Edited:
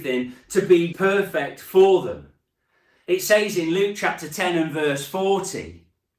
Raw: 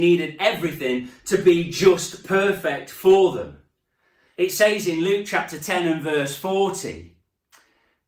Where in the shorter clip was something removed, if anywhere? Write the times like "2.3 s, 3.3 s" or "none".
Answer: 0.9 s